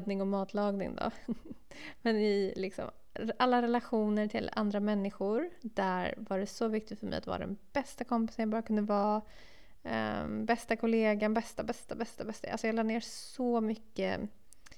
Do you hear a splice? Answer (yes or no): no